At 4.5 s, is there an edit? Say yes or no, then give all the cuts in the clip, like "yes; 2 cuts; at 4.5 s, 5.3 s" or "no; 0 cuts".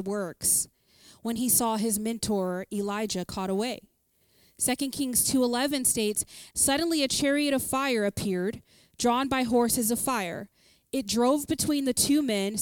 no; 1 cut; at 6.5 s